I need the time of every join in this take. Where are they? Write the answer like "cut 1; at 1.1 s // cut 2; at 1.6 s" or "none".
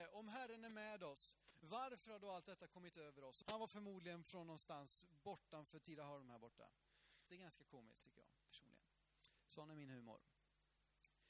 cut 1; at 3.4 s // cut 2; at 7.3 s